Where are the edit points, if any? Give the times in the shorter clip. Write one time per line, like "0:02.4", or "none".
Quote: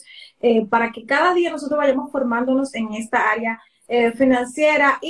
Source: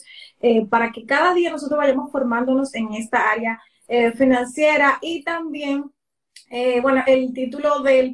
none